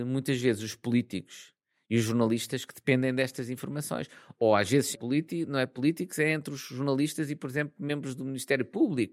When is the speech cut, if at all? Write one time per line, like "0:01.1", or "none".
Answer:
0:04.9